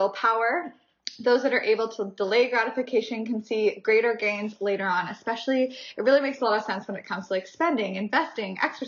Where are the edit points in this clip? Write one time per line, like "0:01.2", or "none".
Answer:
none